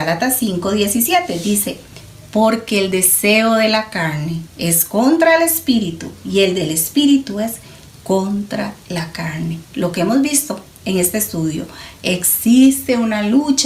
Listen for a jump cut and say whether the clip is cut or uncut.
uncut